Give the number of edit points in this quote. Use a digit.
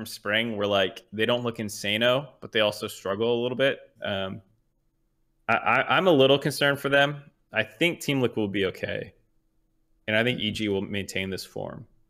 1